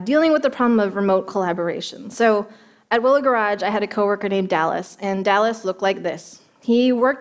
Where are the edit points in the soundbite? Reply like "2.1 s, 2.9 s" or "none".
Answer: none